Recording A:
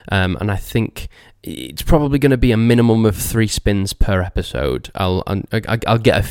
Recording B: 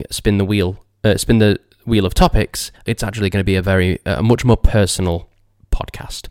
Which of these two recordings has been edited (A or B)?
B